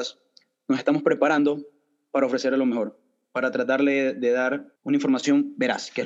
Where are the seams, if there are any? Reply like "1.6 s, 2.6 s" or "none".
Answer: 4.8 s